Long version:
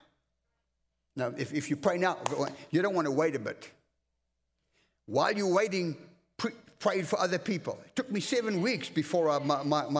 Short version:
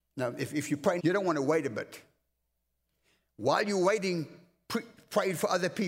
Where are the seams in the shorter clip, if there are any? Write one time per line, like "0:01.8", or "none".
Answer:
0:01.0